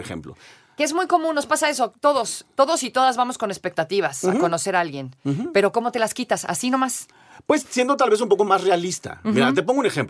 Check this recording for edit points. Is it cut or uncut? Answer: uncut